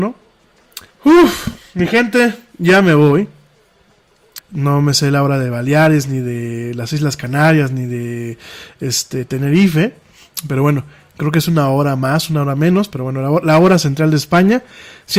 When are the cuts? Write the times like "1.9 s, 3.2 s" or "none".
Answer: 0.9 s, 4.4 s